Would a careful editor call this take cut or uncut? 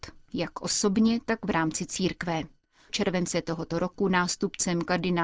cut